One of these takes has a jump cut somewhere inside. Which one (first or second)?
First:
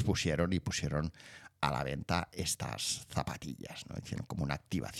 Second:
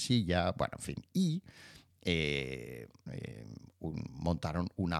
second